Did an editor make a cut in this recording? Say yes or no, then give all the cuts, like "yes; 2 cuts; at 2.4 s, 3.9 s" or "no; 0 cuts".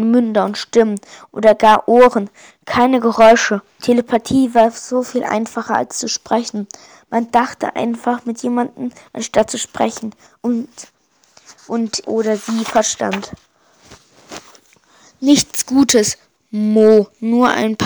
yes; 1 cut; at 12.0 s